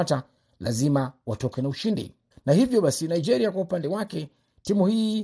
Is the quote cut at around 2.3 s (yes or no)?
yes